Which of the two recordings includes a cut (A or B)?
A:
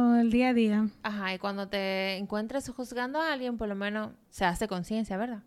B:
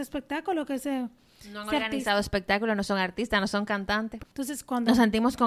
B